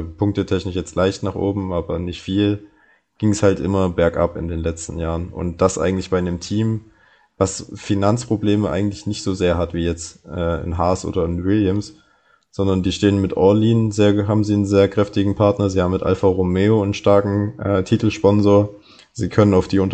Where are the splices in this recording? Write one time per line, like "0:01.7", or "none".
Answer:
none